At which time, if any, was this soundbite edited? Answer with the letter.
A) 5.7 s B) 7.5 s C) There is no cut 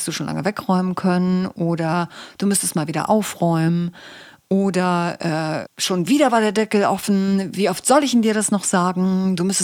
A